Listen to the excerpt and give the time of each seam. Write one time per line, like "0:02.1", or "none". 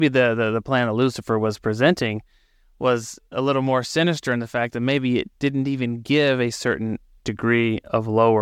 none

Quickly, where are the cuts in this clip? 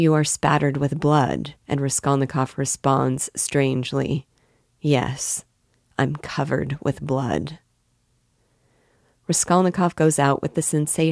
0:01.6

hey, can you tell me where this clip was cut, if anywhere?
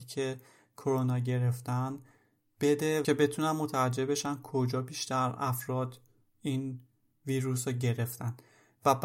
none

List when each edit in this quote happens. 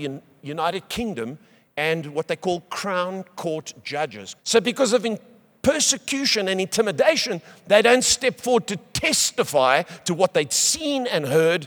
0:04.4

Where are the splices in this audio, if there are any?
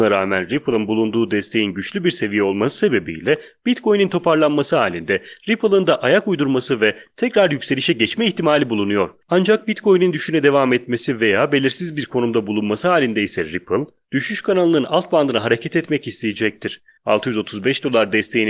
0:09.2
0:17.0

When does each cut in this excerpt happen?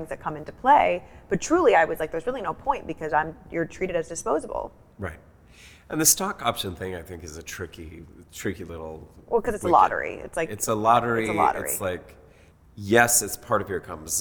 none

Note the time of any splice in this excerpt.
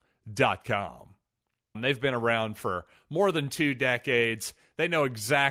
0:01.7

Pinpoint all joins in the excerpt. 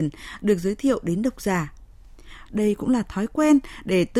0:02.5

